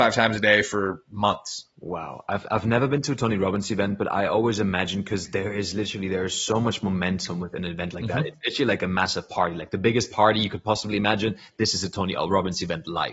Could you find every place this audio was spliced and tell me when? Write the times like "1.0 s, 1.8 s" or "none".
none

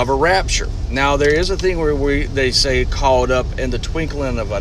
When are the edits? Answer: none

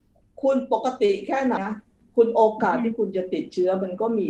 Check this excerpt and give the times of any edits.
1.6 s

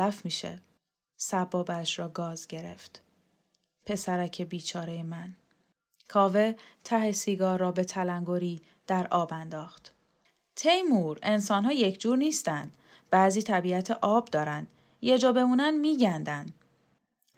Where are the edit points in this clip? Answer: none

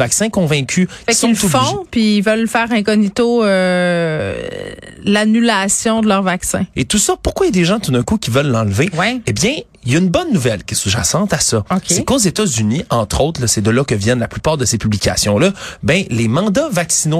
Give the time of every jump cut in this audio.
6.7 s

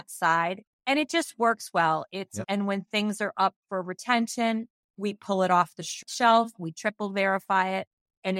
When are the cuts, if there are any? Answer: 2.4 s

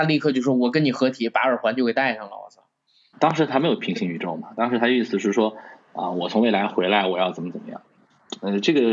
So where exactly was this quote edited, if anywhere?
3.1 s

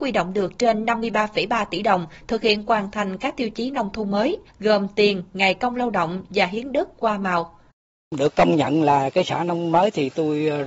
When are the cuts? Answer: 4.5 s

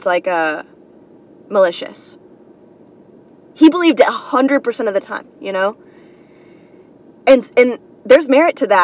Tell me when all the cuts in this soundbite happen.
none

